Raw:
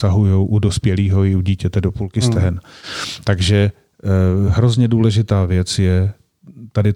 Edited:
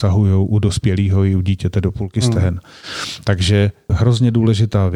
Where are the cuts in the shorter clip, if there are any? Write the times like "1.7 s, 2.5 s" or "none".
3.9 s